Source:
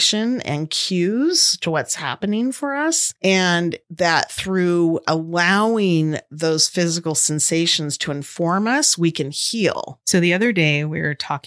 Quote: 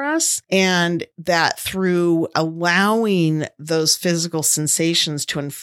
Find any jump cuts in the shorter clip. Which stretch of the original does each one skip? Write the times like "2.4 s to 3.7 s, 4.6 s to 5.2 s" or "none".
none